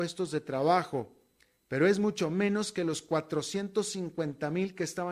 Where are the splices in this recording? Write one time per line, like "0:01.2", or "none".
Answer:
0:01.6